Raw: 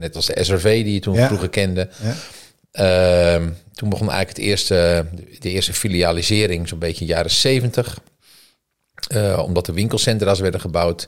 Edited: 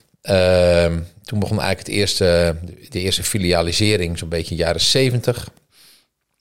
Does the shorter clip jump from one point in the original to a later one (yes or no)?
no